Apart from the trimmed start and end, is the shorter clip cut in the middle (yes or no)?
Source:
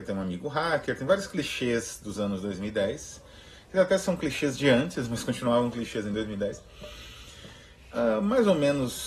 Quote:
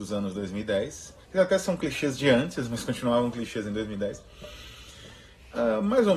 yes